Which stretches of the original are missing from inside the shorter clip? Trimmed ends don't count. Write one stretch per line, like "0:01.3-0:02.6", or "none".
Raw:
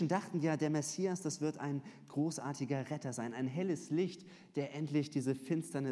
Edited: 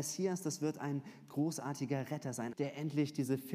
0:03.3-0:04.5